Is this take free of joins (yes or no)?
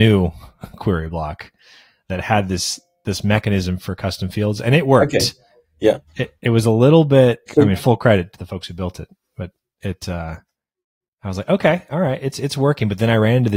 no